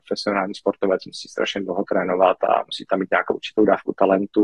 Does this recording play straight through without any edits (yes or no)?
yes